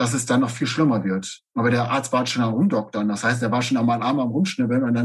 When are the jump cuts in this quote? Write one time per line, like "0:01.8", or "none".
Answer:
0:01.5